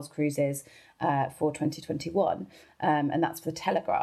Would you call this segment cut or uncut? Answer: uncut